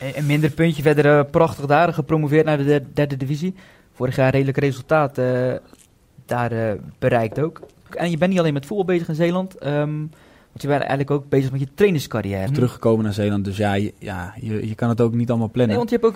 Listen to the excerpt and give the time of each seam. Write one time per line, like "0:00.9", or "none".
0:07.9
0:12.5